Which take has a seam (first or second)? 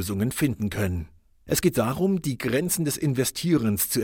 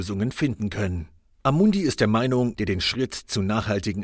second